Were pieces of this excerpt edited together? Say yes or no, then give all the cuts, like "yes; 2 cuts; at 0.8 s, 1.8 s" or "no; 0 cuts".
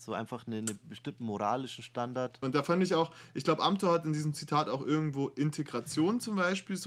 yes; 1 cut; at 2.4 s